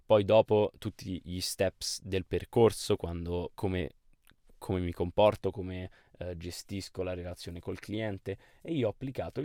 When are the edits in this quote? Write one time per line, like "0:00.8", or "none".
0:03.5

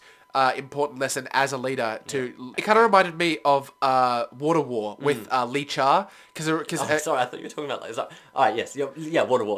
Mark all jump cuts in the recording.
0:02.5

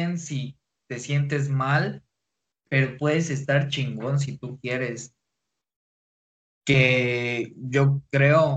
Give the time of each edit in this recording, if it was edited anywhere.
0:06.4

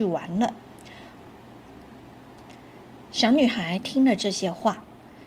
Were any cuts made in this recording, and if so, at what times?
0:01.2

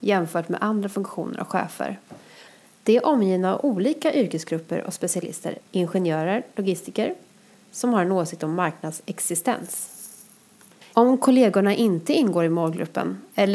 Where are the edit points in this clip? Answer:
0:05.6
0:10.9

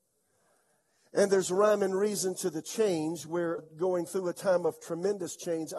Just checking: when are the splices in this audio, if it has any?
0:03.6

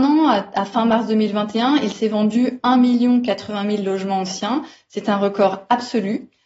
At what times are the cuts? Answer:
none

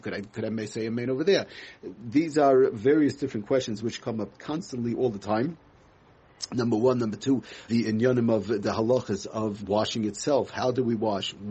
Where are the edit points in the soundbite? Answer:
0:07.7
0:09.6

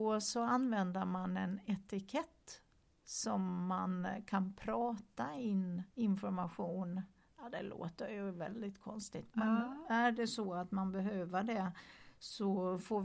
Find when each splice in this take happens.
0:05.9

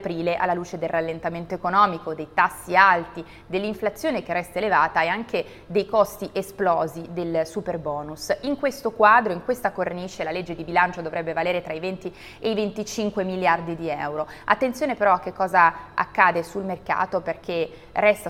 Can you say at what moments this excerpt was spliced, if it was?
none

